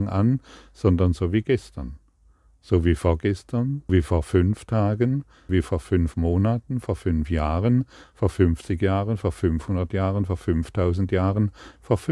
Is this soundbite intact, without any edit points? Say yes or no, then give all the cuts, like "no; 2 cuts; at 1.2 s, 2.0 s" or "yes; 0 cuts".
no; 2 cuts; at 3.9 s, 5.5 s